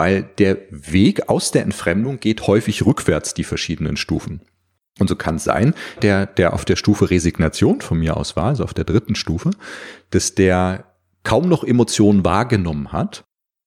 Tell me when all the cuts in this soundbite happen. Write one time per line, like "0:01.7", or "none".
0:06.0